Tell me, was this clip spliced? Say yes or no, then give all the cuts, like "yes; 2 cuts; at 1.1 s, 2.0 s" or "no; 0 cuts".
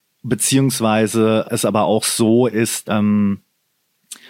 yes; 2 cuts; at 1.4 s, 2.8 s